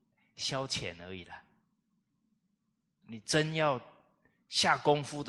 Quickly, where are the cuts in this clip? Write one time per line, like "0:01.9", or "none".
0:03.0